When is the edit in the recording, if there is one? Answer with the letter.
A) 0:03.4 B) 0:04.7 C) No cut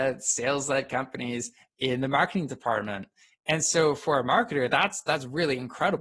A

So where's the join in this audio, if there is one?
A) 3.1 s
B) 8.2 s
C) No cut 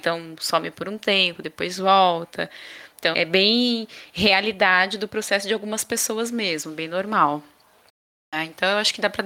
A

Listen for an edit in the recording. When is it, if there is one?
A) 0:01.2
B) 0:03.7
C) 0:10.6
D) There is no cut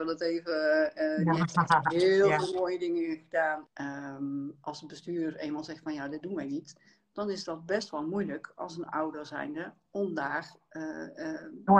B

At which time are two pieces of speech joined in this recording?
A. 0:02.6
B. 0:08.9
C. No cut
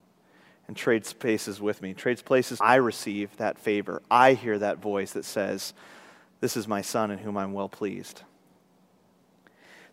A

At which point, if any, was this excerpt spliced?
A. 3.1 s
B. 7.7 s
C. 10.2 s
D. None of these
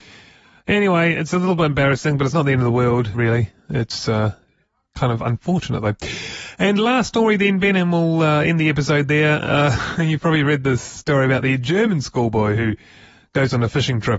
A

